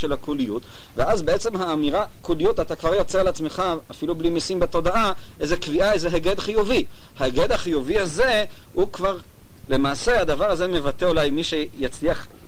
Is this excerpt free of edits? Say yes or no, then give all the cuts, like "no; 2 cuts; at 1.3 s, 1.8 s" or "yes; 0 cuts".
no; 1 cut; at 9.6 s